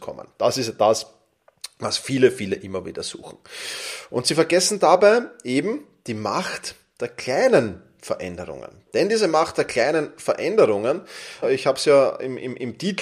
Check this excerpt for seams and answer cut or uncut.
cut